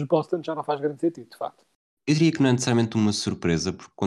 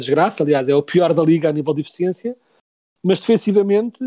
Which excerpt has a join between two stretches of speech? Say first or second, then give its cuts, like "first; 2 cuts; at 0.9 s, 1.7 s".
first; 1 cut; at 2.0 s